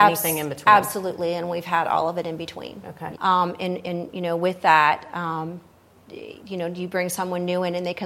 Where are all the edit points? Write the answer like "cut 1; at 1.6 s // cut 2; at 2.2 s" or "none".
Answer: cut 1; at 3.1 s